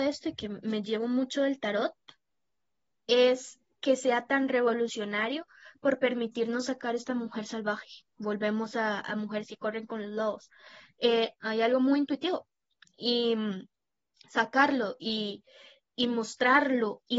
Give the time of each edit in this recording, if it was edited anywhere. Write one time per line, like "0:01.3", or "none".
0:11.3